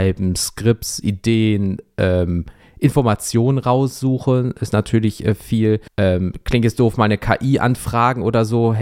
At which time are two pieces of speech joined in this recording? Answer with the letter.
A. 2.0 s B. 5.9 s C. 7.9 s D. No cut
B